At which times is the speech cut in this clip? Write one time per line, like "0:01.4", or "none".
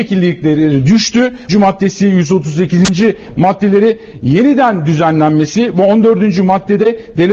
0:01.5